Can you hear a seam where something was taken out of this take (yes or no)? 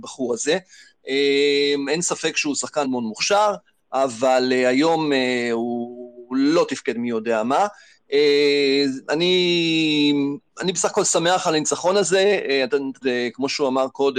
yes